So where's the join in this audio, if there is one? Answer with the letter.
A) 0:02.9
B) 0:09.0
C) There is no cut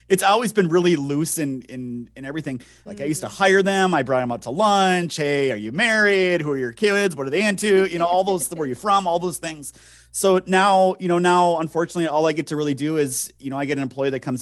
A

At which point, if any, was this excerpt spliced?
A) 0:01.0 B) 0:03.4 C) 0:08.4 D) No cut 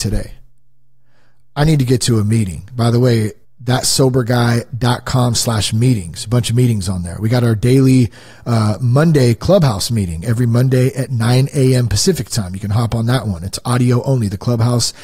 B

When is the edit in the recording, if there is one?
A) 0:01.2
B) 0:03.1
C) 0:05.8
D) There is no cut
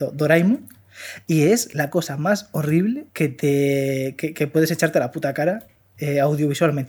B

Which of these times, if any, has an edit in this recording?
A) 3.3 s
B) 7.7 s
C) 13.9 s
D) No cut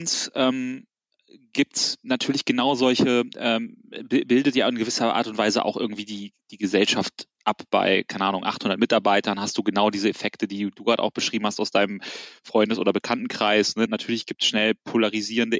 C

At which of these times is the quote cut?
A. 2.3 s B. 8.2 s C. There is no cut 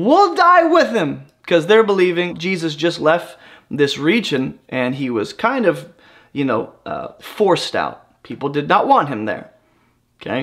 A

